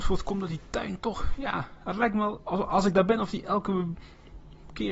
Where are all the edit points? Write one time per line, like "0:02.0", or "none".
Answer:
none